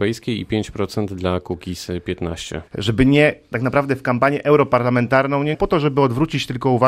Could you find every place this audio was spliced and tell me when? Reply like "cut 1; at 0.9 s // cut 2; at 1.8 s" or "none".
cut 1; at 2.7 s // cut 2; at 5.5 s